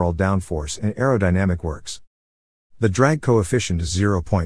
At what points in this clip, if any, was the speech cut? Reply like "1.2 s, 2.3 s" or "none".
none